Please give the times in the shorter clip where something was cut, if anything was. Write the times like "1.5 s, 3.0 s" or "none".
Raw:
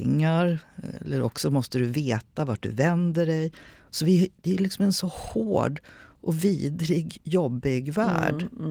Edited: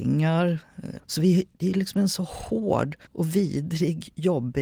1.0 s, 3.1 s